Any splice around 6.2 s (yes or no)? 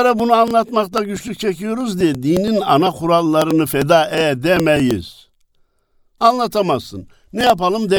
yes